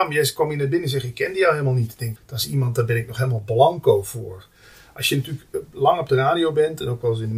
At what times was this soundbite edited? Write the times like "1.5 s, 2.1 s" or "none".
2.2 s